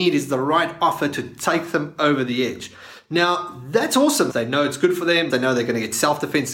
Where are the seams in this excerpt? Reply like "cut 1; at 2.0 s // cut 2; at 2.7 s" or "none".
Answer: cut 1; at 4.3 s // cut 2; at 5.3 s